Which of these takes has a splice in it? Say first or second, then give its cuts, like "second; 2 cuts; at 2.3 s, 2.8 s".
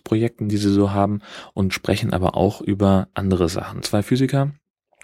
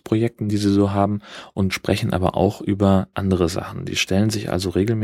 first; 1 cut; at 3.8 s